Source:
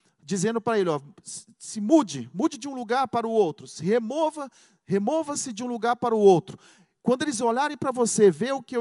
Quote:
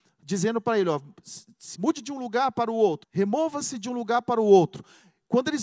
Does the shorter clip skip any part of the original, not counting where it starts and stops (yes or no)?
yes